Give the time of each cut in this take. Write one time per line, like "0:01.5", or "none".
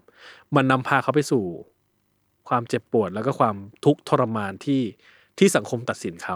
none